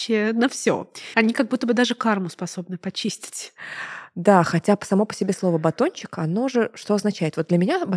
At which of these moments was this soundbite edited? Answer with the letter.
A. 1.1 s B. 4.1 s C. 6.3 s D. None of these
A